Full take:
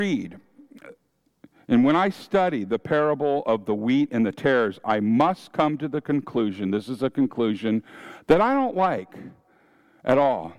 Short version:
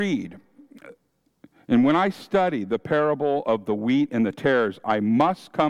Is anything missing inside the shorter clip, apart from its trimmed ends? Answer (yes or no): no